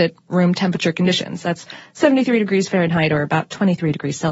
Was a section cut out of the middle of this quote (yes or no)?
no